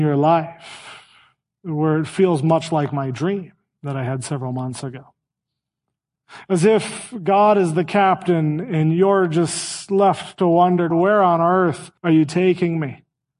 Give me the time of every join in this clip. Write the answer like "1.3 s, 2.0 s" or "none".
10.9 s, 12.0 s